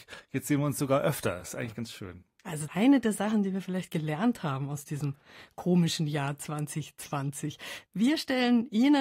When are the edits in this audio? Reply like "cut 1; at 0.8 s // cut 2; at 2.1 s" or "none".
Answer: none